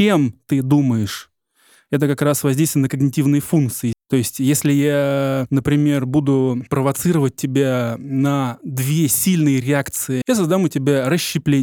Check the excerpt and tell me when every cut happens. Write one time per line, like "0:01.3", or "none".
0:03.9
0:10.2